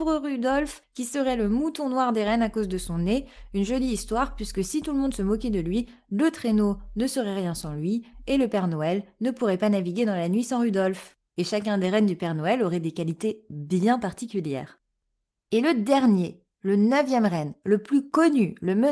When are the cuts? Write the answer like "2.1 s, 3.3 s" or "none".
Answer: 11.3 s, 15.4 s